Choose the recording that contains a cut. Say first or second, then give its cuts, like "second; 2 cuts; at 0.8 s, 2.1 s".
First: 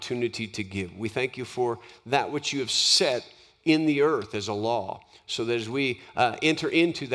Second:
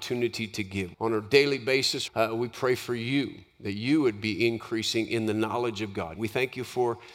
second; 3 cuts; at 0.9 s, 2.1 s, 6.2 s